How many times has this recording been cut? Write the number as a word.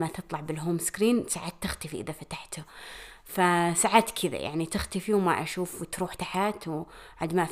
one